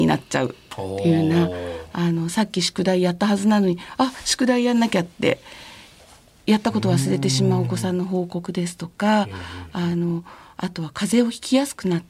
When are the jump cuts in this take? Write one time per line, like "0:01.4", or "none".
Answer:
none